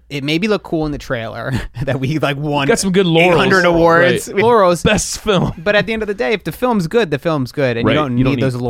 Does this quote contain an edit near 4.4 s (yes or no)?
yes